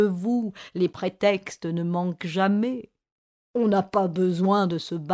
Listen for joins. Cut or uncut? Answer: uncut